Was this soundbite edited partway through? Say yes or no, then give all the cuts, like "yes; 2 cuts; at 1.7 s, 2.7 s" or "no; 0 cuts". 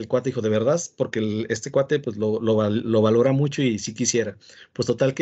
no; 0 cuts